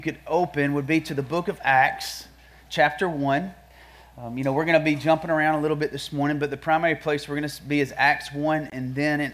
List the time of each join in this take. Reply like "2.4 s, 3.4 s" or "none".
none